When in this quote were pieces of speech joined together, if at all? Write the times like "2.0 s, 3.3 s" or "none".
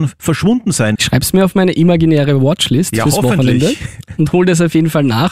0.9 s